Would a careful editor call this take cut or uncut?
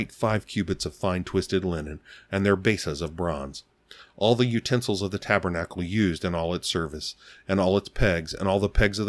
uncut